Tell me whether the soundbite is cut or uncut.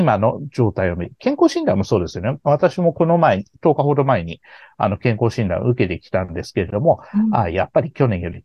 uncut